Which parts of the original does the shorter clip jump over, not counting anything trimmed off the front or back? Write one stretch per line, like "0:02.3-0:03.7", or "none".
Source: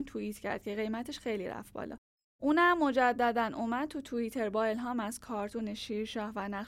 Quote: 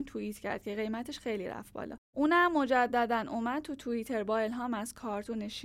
0:02.1-0:02.3